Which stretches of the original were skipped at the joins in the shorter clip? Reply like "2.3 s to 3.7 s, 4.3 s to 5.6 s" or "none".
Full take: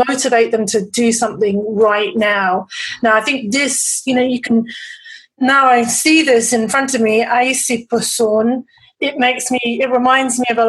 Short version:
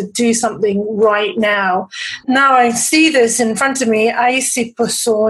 3.0 s to 5.3 s